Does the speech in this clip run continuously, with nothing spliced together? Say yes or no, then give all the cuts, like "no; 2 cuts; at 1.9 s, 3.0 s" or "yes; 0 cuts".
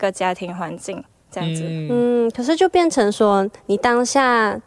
yes; 0 cuts